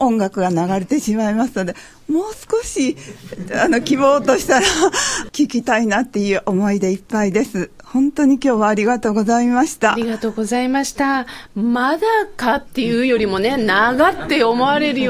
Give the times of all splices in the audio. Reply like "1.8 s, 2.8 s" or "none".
none